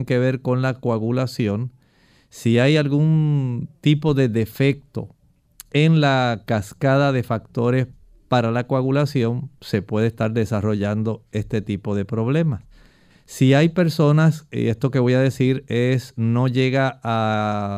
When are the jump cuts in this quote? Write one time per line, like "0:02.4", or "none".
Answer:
none